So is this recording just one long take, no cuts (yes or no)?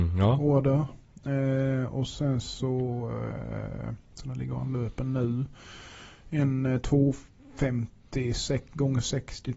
yes